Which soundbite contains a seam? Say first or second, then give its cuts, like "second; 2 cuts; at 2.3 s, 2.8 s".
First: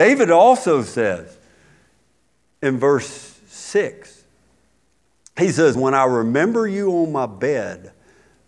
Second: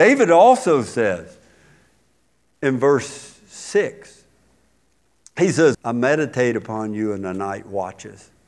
second; 1 cut; at 5.7 s